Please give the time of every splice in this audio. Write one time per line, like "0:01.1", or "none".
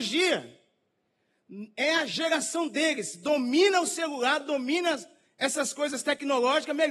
none